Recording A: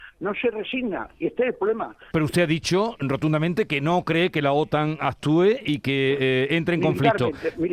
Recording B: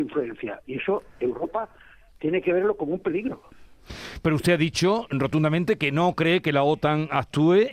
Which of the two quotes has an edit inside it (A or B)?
A